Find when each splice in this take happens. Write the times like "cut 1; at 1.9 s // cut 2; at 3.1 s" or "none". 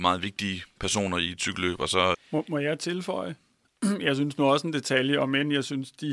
cut 1; at 2.1 s

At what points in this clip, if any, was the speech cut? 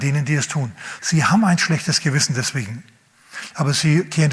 cut 1; at 1.0 s

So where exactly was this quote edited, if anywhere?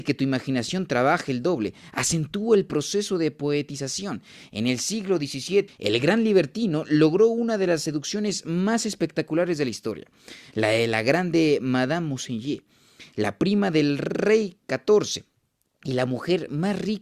cut 1; at 5.7 s

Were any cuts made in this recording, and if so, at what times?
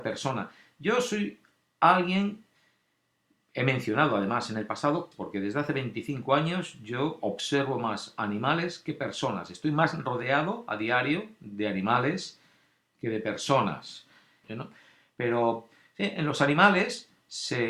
cut 1; at 5.1 s // cut 2; at 14.4 s

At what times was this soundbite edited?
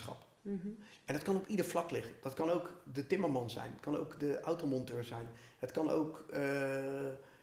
none

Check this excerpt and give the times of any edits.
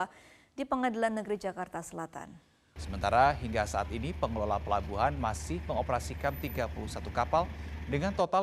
cut 1; at 2.8 s

